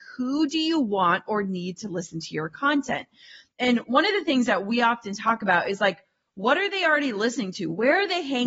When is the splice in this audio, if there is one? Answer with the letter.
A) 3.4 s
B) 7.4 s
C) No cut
C